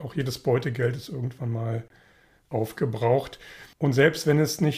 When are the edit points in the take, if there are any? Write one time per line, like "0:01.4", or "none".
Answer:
0:03.7